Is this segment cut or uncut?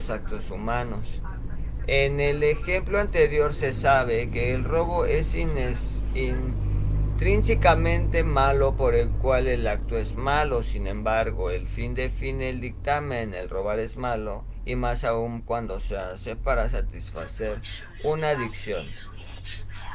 uncut